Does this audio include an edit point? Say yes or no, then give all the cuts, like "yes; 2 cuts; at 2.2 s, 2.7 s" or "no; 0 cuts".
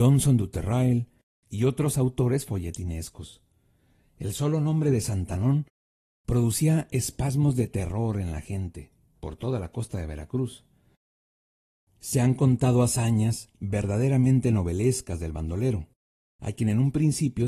no; 0 cuts